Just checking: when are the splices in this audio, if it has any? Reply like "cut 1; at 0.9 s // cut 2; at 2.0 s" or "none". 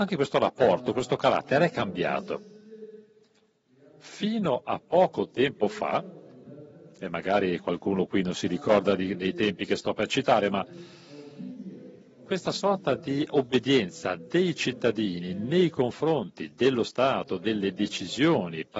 none